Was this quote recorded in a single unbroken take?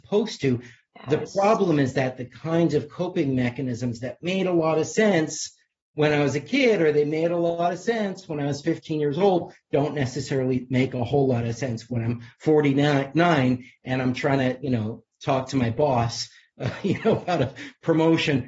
yes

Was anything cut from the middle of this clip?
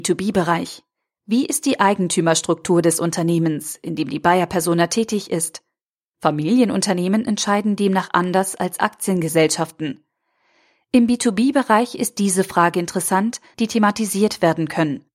yes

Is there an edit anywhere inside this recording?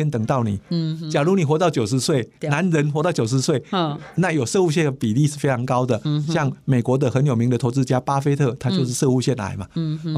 no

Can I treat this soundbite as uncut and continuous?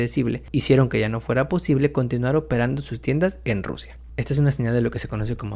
yes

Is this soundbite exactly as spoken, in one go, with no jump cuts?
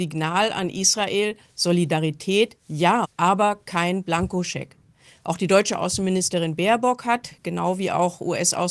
no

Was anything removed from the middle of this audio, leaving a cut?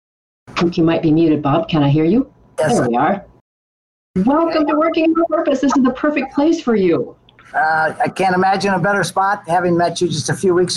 no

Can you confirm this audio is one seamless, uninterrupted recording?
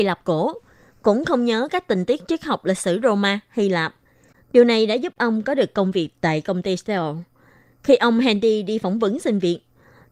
no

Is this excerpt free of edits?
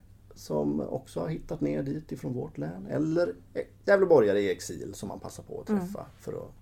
yes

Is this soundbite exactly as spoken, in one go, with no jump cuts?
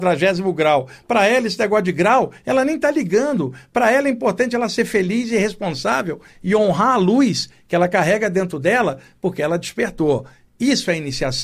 yes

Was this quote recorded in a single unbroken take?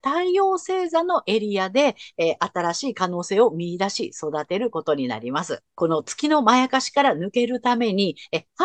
no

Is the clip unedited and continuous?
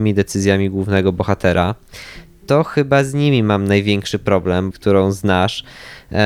no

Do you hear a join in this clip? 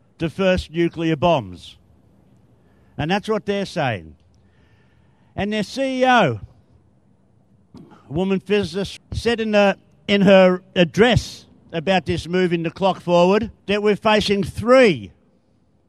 yes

